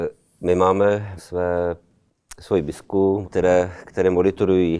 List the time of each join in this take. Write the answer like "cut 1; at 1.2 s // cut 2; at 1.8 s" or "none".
cut 1; at 1.2 s // cut 2; at 3.2 s